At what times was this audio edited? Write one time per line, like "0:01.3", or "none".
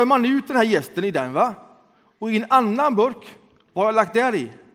none